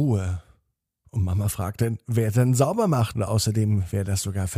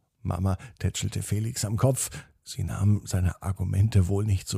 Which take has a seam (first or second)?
first